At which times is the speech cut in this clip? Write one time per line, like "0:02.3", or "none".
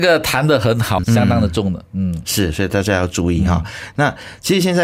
0:01.0